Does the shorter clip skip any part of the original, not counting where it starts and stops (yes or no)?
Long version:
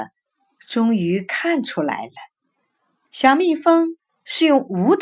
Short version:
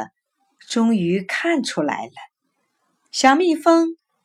no